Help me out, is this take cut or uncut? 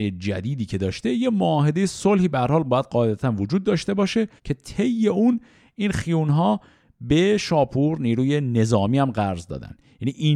cut